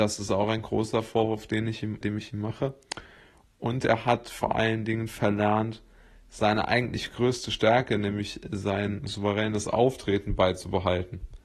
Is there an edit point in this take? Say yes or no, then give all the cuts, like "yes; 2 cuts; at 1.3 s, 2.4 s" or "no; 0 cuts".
yes; 1 cut; at 2.0 s